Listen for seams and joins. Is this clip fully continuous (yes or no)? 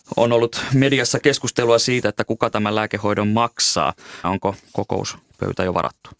no